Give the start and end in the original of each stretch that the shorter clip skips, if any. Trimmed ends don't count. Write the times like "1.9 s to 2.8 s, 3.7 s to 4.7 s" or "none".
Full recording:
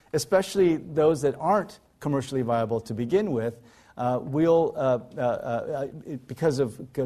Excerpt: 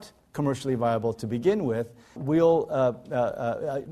3.8 s to 4.2 s